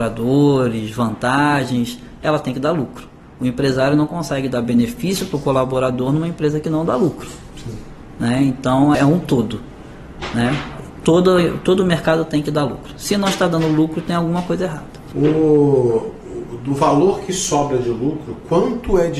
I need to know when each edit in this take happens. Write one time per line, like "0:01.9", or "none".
0:08.9